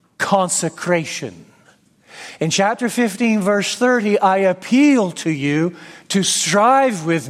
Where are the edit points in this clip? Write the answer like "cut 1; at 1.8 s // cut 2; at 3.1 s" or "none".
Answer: none